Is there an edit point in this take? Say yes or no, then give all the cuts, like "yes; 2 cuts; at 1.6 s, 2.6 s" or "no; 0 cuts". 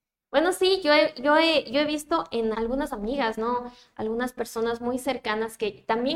yes; 1 cut; at 2.5 s